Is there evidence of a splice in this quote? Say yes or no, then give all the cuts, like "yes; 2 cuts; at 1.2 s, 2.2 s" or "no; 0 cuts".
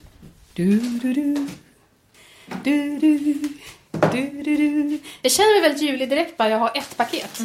yes; 1 cut; at 3.0 s